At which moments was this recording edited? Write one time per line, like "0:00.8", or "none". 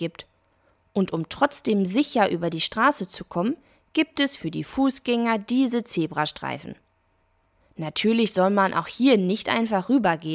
none